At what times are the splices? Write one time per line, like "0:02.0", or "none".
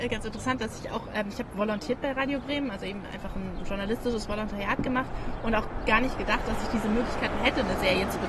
none